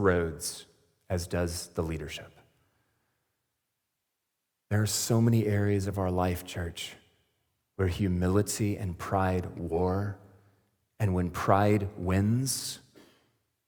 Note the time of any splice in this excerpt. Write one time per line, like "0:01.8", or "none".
none